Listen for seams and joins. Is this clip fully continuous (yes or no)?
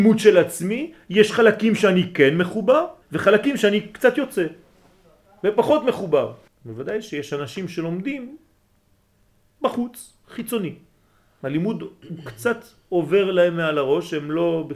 no